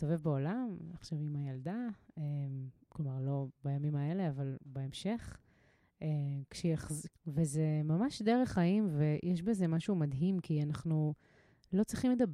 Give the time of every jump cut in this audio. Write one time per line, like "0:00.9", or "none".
0:07.1